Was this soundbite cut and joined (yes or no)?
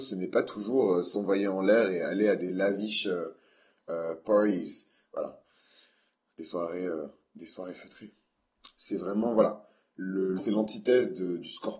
yes